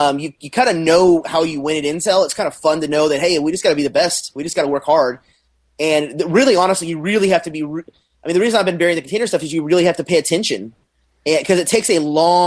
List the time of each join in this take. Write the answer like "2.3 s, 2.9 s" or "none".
none